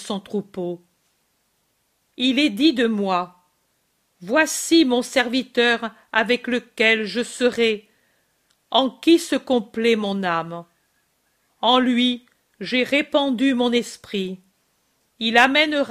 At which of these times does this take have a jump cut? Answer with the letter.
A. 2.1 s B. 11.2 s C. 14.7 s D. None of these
D